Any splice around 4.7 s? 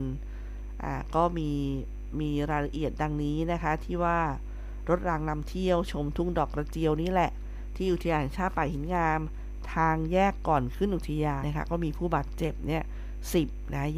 no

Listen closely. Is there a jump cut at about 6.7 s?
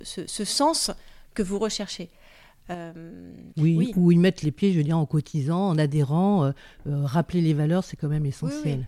no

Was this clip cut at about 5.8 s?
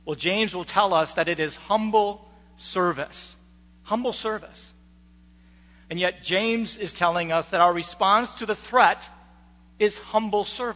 yes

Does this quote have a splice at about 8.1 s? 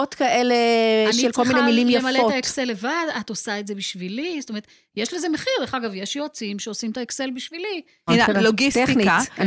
yes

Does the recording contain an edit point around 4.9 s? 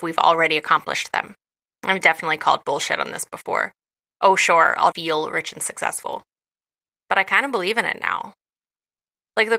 yes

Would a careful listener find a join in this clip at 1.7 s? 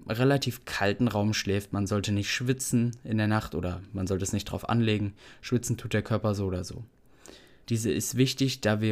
no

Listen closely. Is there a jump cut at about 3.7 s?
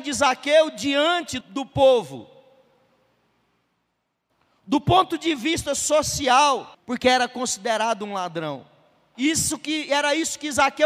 no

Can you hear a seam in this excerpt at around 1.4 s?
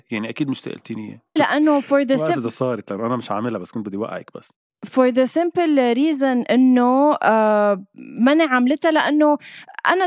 yes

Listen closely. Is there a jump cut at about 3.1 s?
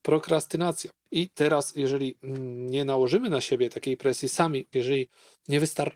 no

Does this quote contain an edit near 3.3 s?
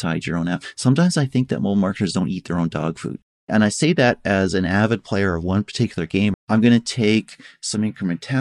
no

